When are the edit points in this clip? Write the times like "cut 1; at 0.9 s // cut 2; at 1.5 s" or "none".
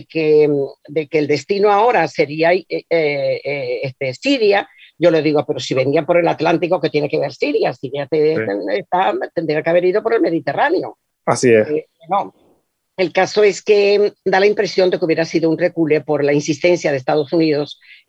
none